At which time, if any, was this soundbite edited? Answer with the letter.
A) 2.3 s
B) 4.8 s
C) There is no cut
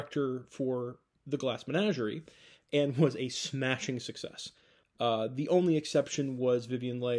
B